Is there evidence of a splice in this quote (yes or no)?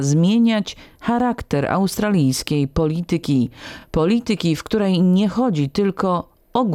no